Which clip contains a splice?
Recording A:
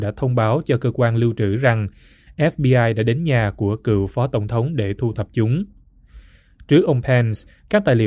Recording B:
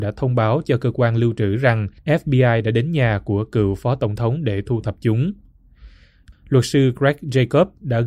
B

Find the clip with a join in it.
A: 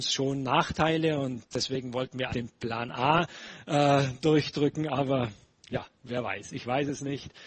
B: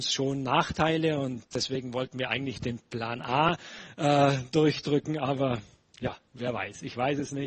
A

